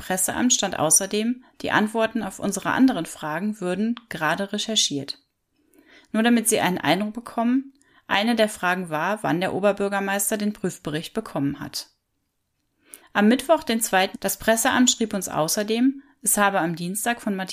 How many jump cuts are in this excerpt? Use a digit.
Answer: 2